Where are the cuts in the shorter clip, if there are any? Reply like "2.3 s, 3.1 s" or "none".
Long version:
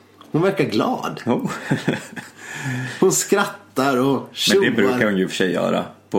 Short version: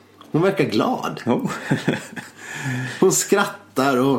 none